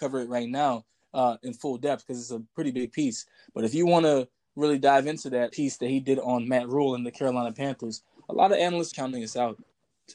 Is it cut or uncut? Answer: cut